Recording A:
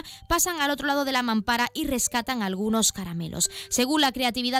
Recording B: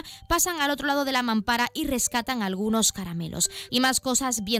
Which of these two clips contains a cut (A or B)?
B